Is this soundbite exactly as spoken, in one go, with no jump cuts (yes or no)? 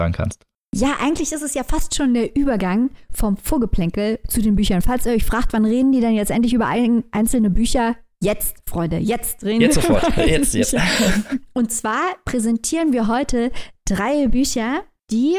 yes